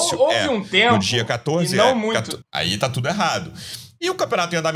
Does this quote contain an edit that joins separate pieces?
yes; 1 cut; at 2.4 s

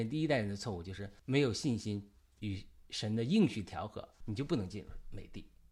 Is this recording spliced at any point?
yes; 2 cuts; at 1.2 s, 4.2 s

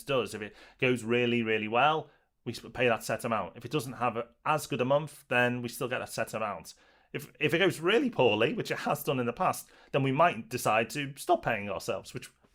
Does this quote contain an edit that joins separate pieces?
no; 0 cuts

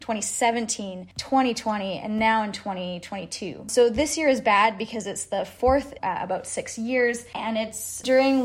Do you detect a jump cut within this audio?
no; 0 cuts

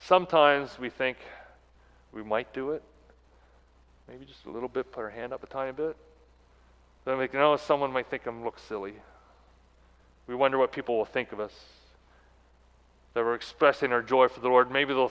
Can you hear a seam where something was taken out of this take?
no; 0 cuts

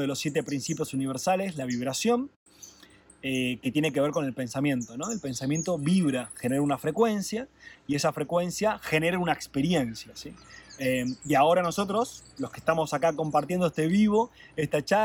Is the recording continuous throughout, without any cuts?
yes; 0 cuts

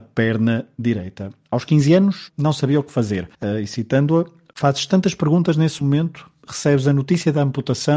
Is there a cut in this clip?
yes; 2 cuts; at 2.3 s, 3.3 s

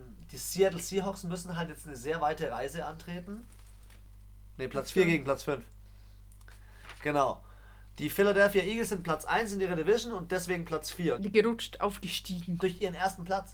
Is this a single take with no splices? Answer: no; 2 cuts; at 11.2 s, 12.6 s

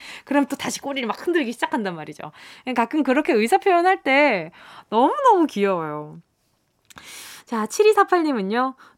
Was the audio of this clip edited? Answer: no; 0 cuts

